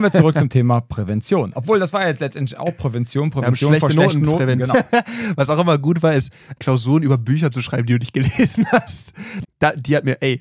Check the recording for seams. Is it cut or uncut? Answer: cut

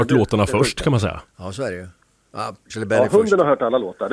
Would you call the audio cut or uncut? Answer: cut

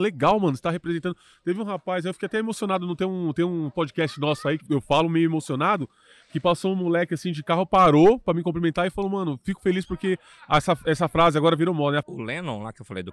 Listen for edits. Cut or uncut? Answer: cut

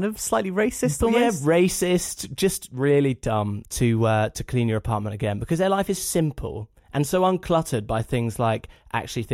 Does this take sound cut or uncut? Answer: cut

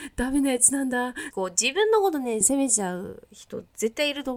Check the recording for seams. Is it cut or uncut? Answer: cut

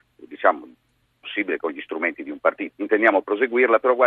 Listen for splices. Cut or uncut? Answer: cut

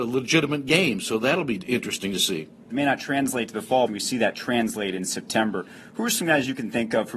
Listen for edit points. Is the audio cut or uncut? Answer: cut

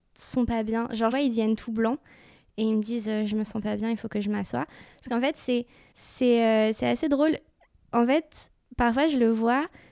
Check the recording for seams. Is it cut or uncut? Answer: cut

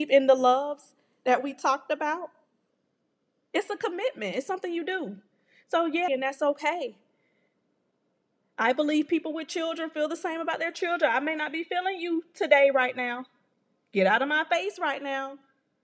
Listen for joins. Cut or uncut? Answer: cut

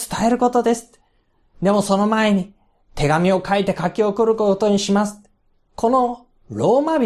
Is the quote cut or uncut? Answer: cut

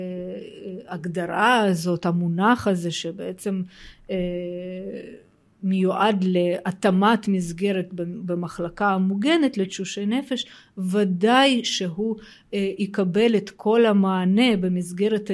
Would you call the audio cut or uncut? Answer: uncut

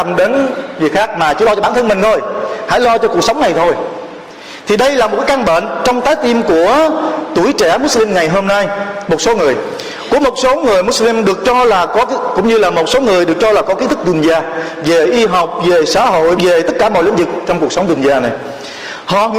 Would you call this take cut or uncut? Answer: cut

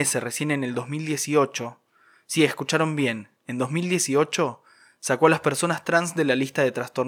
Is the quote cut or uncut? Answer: uncut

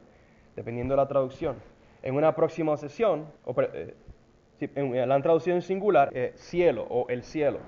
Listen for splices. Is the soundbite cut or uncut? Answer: cut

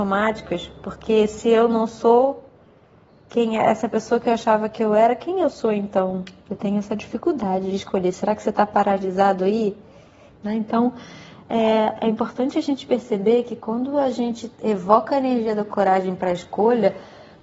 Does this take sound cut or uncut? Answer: cut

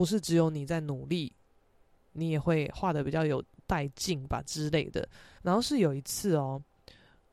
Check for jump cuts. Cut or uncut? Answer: cut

